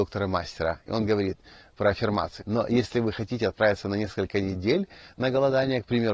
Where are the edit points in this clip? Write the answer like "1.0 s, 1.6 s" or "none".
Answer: 2.4 s